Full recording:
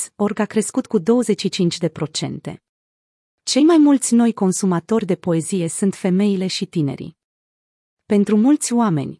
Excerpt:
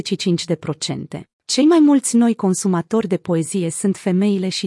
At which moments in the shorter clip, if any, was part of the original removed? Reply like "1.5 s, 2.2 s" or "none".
1.3 s

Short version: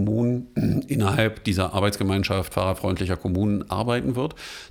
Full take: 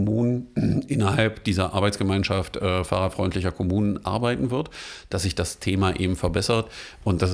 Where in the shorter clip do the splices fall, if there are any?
2.5 s

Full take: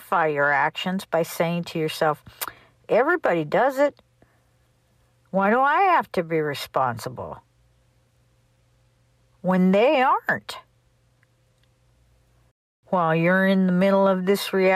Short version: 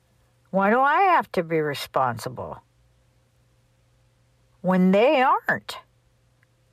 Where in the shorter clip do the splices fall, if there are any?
none

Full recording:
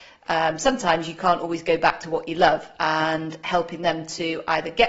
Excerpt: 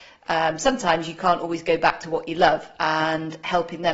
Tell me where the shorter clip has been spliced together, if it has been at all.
none

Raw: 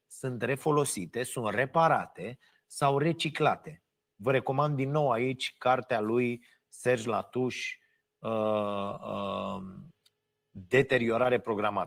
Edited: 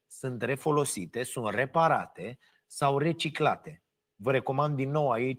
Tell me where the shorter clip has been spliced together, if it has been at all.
none

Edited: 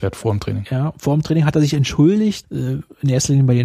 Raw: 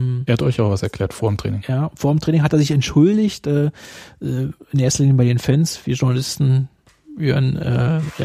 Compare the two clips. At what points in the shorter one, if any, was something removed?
2.4 s

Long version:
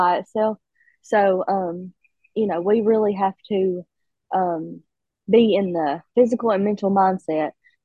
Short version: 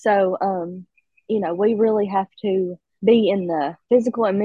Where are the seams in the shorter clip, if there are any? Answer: 3.0 s

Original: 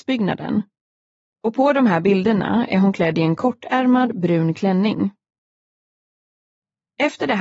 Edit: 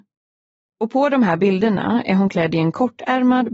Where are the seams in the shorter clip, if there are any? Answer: none

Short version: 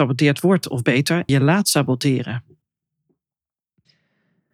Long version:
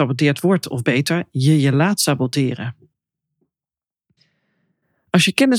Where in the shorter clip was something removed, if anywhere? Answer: 1.3 s

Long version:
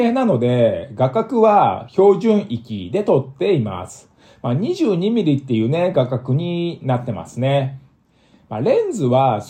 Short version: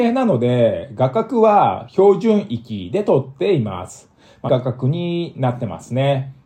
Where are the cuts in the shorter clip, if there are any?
4.5 s

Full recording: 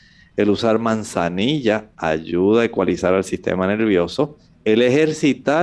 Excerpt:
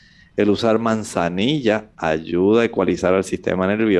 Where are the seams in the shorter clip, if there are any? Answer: none

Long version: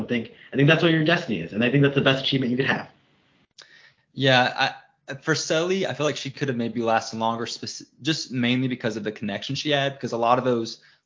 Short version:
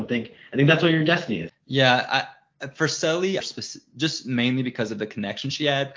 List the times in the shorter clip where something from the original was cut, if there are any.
1.5 s, 3.4 s

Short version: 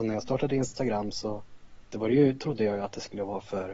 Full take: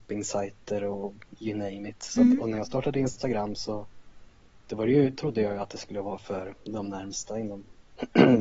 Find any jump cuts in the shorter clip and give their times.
1.8 s

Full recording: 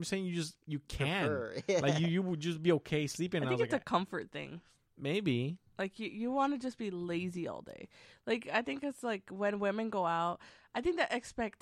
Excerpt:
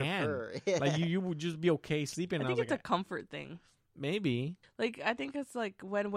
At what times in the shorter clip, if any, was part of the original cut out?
4.6 s

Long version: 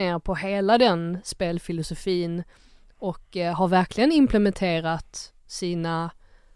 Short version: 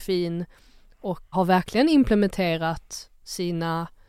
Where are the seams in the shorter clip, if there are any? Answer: 1.3 s

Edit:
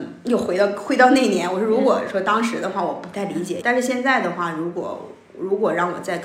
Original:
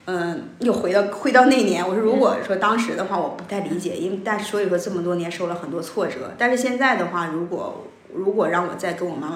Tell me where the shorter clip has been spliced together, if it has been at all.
3.6 s

